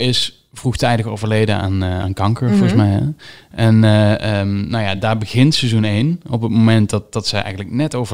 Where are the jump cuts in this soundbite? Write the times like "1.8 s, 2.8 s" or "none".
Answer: none